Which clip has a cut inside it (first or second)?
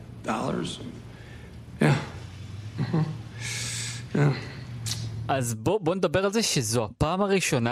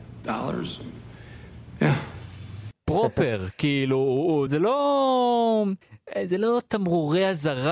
second